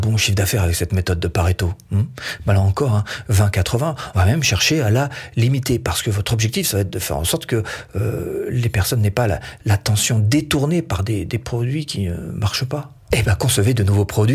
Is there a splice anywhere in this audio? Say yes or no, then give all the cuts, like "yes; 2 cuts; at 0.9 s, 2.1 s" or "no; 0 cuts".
yes; 2 cuts; at 4.1 s, 13.1 s